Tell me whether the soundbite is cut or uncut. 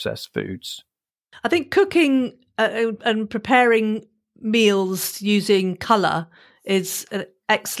uncut